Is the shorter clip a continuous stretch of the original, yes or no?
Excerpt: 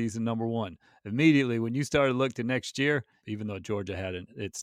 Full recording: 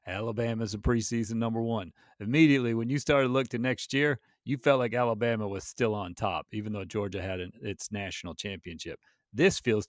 no